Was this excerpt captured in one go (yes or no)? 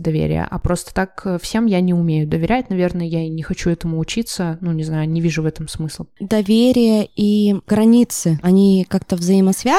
yes